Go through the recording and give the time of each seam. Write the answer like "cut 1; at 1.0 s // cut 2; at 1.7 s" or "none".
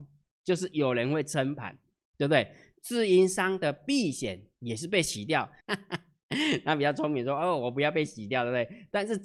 cut 1; at 2.7 s // cut 2; at 5.6 s